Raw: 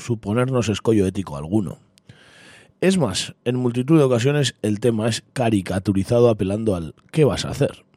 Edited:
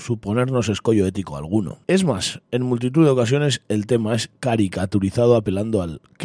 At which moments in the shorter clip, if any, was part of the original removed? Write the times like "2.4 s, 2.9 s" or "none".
1.8 s